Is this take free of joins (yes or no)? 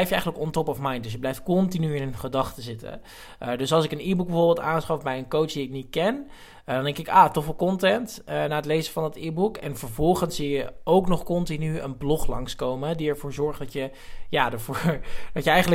yes